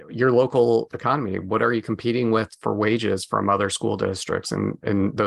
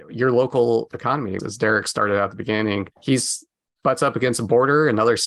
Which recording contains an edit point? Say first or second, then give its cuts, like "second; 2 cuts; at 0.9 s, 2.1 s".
second; 2 cuts; at 1.4 s, 2.9 s